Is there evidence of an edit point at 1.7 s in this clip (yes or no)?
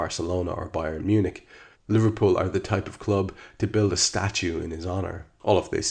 yes